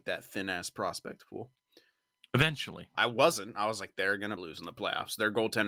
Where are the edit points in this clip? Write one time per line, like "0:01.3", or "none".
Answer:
0:03.0
0:04.4